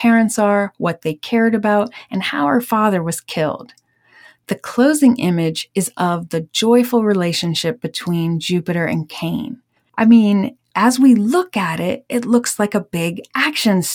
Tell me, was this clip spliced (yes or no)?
yes